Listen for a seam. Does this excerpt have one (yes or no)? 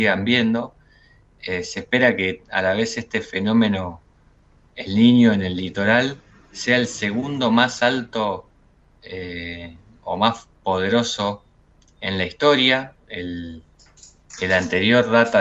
no